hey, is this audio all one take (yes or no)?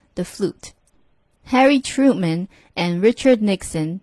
no